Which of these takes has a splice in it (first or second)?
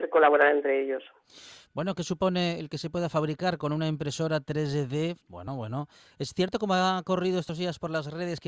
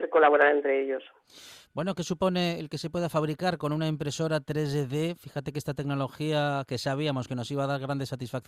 first